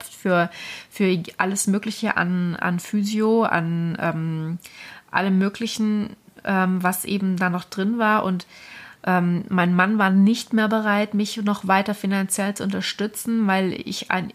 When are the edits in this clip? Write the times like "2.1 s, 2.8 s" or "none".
none

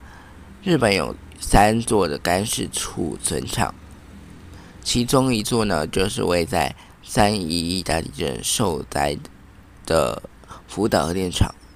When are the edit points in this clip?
none

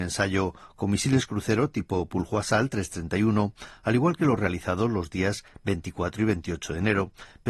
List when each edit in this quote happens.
none

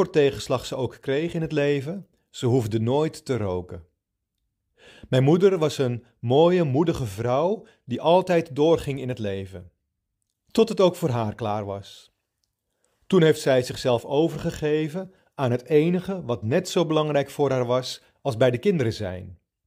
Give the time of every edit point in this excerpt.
none

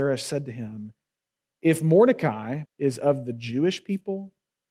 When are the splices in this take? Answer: 2.7 s

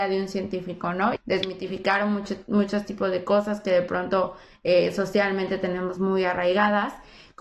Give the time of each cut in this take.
1.2 s

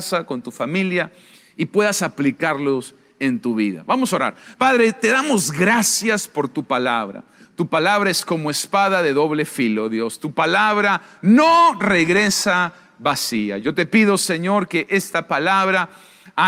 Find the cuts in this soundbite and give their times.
none

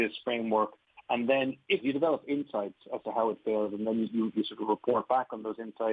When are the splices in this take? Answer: 1.8 s, 4.3 s

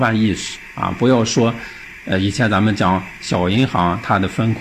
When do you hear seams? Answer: none

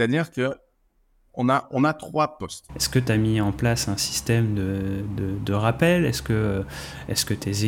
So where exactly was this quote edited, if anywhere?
2.7 s

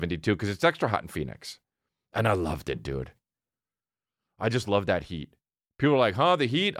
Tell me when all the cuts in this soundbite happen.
none

